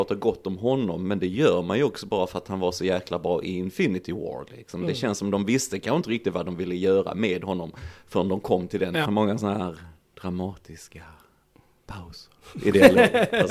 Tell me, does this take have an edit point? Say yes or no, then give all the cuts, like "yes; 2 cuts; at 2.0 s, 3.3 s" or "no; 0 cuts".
yes; 1 cut; at 9.1 s